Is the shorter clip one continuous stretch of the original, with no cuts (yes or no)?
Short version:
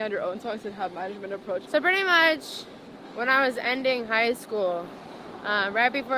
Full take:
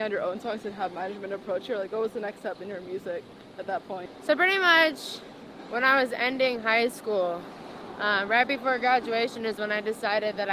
no